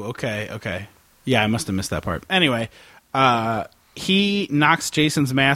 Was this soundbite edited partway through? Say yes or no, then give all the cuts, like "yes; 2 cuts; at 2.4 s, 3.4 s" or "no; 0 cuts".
no; 0 cuts